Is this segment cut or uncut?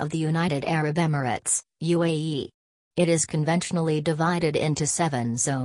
uncut